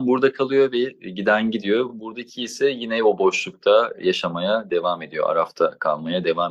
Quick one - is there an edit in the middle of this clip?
no; 0 cuts

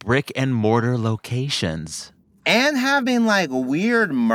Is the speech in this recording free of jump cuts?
yes; 0 cuts

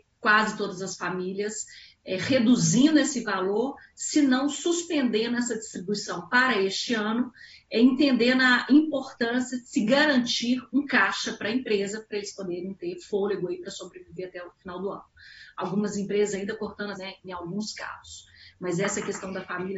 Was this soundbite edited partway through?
yes; 1 cut; at 16.9 s

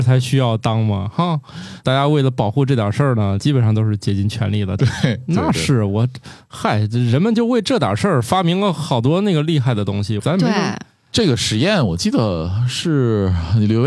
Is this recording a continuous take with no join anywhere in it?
no; 2 cuts; at 4.8 s, 10.2 s

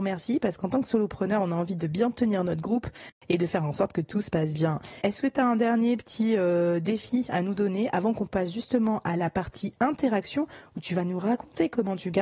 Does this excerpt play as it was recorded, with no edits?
no; 1 cut; at 5.0 s

